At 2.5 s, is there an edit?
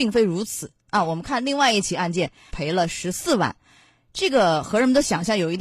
yes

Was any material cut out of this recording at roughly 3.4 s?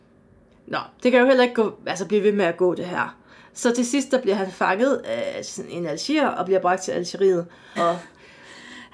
no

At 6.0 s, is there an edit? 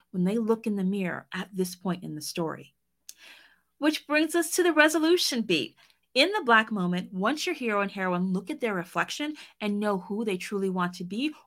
yes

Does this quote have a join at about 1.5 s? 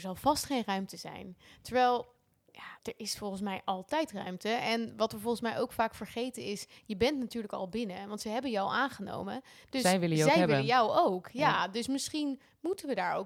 no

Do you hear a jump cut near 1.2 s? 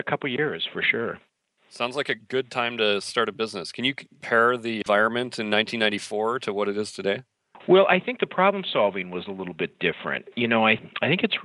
no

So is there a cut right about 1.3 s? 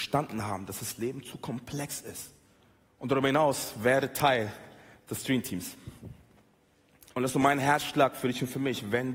no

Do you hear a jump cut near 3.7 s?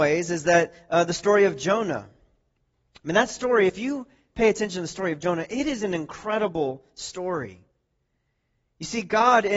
no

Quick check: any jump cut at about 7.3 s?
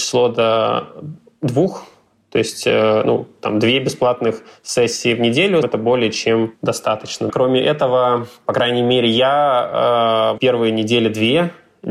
yes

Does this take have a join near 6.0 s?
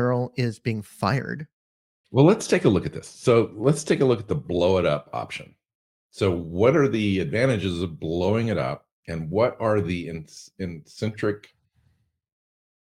no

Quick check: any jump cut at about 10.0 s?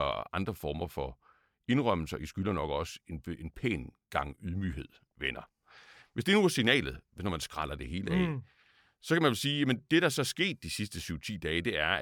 no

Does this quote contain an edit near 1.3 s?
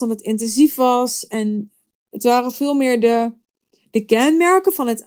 no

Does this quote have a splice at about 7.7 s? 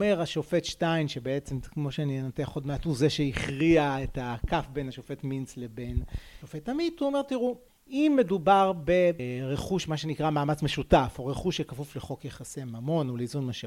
no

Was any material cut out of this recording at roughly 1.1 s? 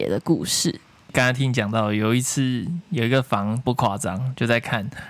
yes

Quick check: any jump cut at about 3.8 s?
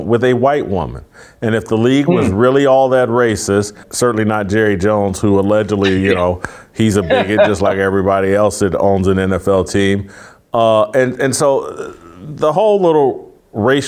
yes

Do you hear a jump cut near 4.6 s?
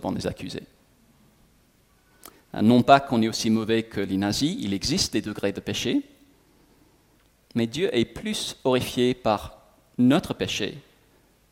no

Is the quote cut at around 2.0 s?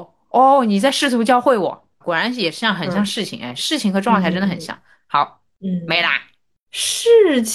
yes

